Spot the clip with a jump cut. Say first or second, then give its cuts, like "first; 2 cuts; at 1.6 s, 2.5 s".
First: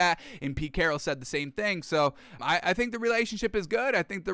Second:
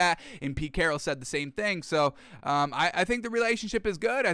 first; 1 cut; at 2.4 s